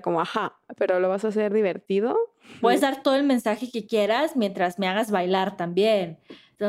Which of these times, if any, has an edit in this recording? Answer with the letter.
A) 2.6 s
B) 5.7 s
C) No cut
A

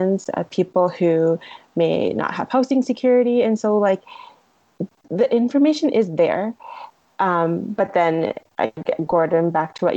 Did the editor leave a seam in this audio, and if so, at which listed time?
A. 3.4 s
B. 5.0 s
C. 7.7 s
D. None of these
B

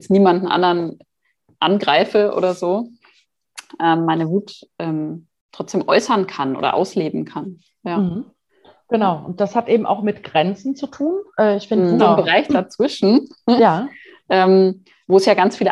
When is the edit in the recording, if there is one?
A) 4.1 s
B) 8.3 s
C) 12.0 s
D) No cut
C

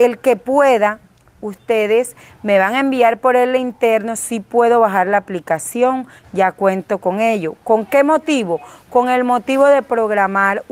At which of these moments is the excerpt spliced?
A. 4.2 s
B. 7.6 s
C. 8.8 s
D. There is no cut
A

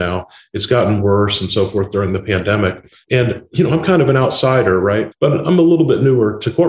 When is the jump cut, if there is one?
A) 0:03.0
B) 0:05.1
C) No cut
B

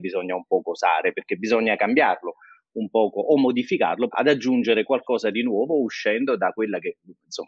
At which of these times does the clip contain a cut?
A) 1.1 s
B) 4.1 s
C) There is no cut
B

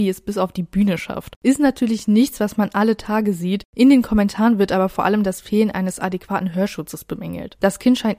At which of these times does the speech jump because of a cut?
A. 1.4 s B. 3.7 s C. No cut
A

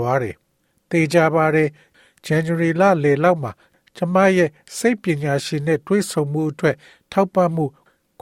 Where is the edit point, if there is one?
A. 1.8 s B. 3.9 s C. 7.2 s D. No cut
D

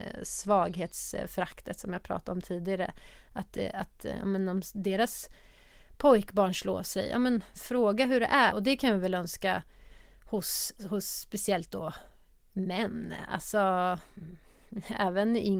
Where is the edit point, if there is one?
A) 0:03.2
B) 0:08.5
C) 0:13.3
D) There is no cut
B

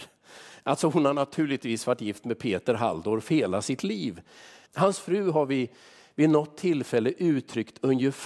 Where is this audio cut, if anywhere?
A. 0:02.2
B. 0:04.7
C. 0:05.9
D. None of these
B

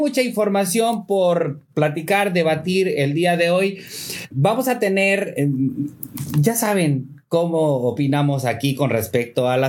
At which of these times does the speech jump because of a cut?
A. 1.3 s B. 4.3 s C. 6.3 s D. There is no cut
B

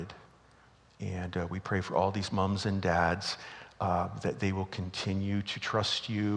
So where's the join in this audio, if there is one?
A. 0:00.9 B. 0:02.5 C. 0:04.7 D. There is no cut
D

